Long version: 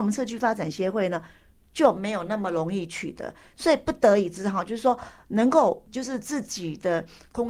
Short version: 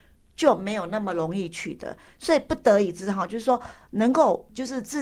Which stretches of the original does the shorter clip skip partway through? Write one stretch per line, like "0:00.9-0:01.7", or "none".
none